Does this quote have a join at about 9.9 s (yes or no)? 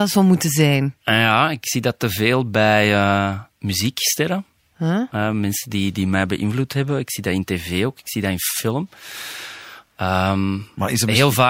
no